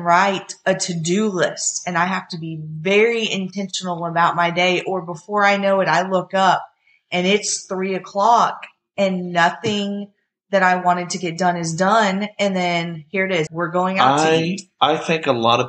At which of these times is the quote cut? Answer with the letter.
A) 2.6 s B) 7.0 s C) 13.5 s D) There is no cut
C